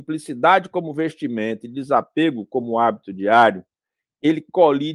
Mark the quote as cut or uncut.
uncut